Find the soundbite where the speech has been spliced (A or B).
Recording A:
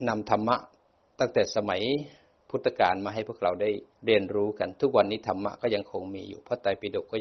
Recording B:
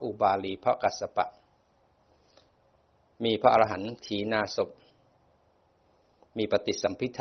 A